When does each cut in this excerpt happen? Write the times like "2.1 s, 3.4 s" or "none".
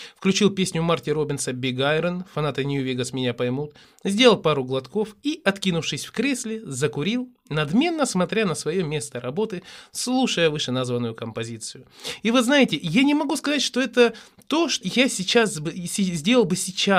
14.8 s